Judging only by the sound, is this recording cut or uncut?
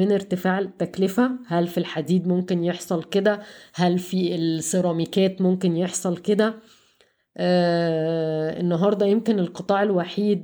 uncut